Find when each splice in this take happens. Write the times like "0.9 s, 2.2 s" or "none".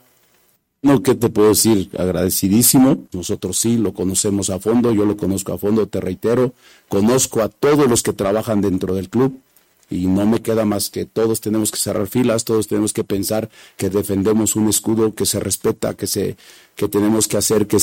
3.1 s, 16.0 s

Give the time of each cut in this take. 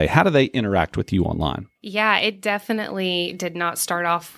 1.7 s

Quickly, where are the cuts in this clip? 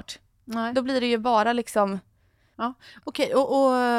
2.5 s

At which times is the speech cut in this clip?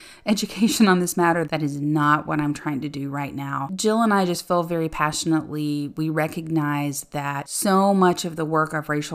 1.5 s

